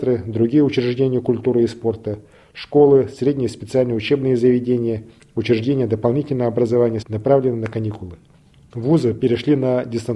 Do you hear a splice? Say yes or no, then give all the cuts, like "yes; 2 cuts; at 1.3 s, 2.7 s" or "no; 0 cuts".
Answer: yes; 1 cut; at 7.0 s